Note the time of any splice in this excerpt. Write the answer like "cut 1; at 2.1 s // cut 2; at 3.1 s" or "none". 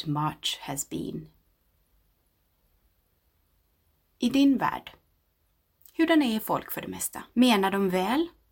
cut 1; at 7.3 s

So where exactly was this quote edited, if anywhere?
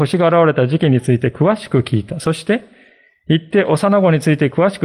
none

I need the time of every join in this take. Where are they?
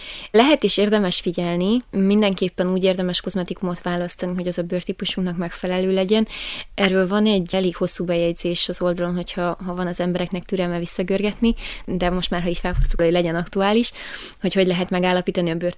cut 1; at 13.0 s

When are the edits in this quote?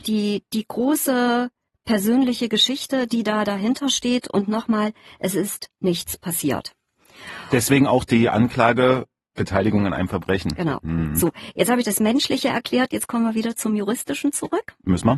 none

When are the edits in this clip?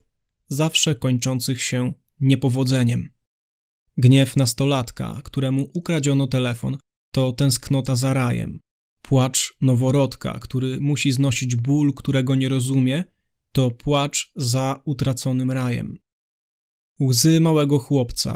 cut 1; at 3.9 s // cut 2; at 8.9 s

